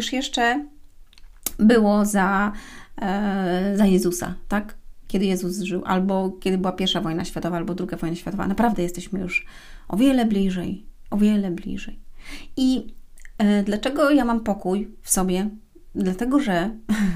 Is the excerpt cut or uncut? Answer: uncut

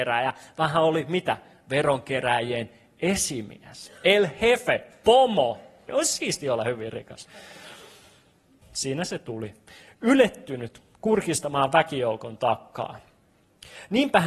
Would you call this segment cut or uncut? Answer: cut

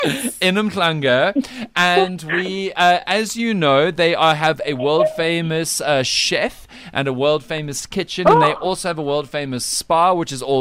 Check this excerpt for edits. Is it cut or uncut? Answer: uncut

